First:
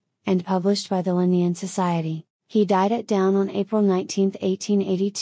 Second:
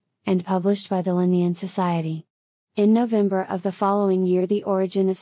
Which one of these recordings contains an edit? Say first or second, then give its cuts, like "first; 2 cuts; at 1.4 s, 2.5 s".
first; 1 cut; at 2.4 s